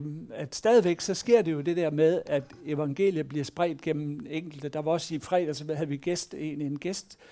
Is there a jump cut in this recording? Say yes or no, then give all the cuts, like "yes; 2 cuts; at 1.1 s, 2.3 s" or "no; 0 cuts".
no; 0 cuts